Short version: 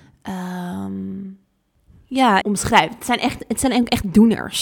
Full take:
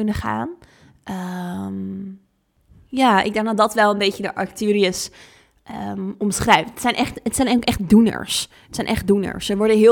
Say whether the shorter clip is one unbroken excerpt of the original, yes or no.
no